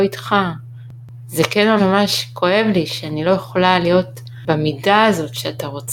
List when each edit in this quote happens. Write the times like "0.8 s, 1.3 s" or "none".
1.8 s